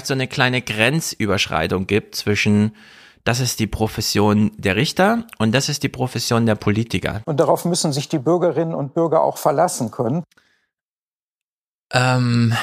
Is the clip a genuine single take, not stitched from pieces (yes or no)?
no